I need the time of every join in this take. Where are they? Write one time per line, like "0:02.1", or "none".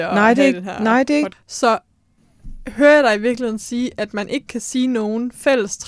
0:01.3

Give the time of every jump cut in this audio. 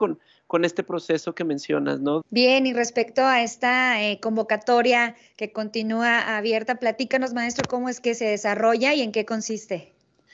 0:02.2

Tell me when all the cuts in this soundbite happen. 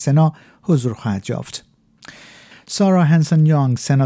0:02.5

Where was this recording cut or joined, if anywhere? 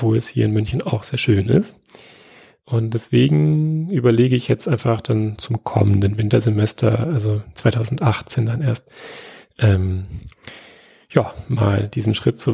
none

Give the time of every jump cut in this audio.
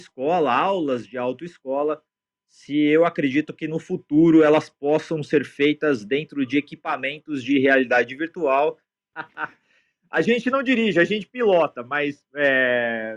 0:09.1

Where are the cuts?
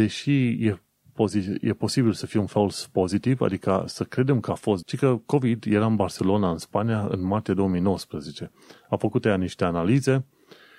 0:04.8

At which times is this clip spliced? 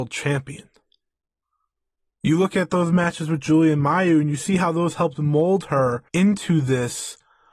0:02.2
0:06.1

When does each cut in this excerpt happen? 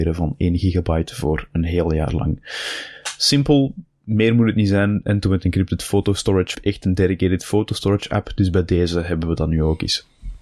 0:06.5

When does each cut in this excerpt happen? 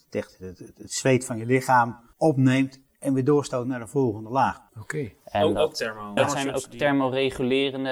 0:02.1
0:04.7
0:06.2

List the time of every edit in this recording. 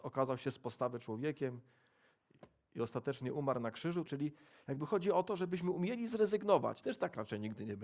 0:04.1
0:06.8

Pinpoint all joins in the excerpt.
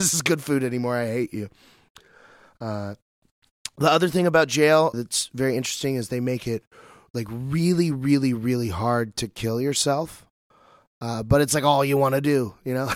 0:04.9

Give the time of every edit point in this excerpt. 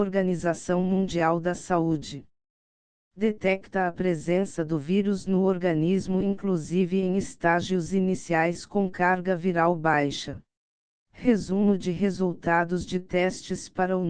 0:10.9

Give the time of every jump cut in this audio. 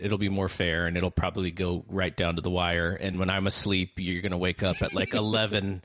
0:03.1

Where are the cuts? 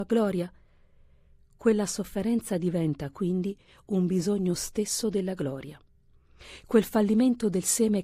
none

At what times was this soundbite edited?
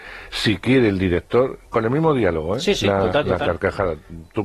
none

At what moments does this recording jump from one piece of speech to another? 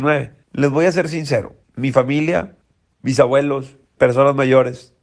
none

